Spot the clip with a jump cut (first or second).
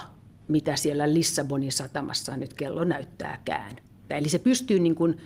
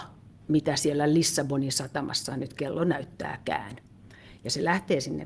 first